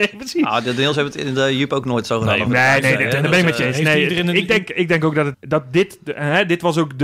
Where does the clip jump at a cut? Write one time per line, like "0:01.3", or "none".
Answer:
0:05.3